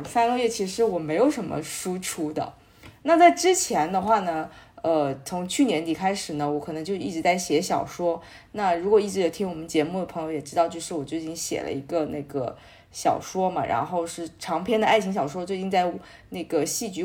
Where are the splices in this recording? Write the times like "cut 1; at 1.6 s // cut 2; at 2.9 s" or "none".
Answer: none